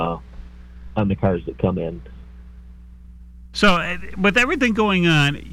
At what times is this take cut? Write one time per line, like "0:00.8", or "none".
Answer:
0:03.5